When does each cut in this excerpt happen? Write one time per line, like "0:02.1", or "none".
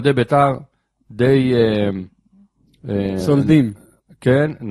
none

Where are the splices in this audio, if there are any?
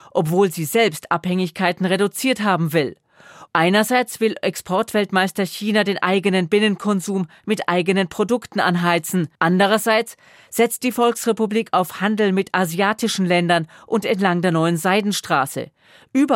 0:03.5
0:09.4

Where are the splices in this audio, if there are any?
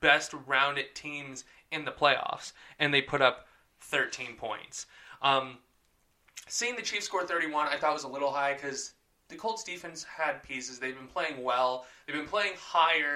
none

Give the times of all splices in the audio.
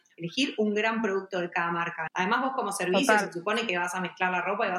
0:02.1

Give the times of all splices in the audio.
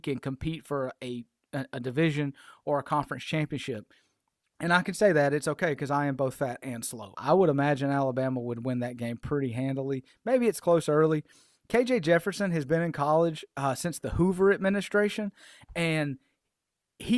0:04.6
0:07.1

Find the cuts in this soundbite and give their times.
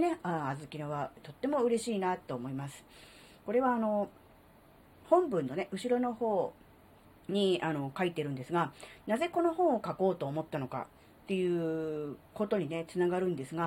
none

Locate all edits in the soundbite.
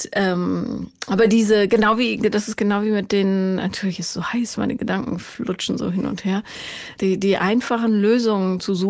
0:07.0

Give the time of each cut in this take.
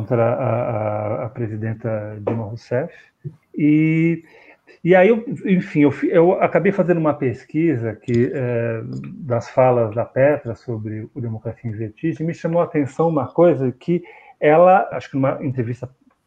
0:03.4
0:14.9

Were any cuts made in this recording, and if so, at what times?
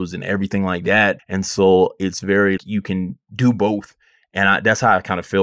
0:01.2
0:02.6

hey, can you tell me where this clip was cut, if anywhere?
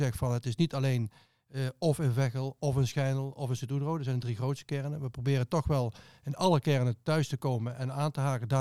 none

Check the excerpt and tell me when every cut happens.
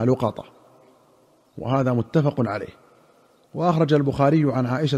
none

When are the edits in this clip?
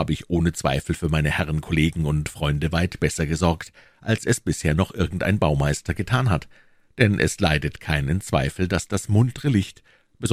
none

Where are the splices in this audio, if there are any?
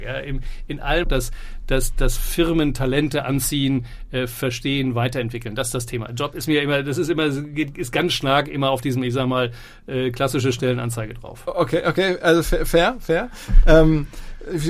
0:01.0

